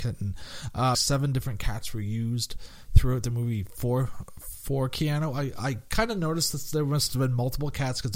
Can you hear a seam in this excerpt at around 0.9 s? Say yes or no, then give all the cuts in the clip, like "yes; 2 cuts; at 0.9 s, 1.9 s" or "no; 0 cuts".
yes; 1 cut; at 0.9 s